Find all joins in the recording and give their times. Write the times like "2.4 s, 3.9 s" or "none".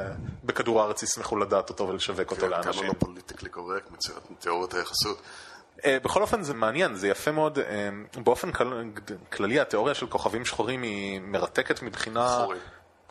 6.5 s